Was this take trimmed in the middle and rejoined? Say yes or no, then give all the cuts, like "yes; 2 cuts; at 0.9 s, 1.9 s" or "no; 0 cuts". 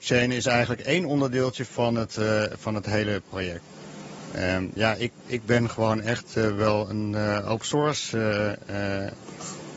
yes; 1 cut; at 4.8 s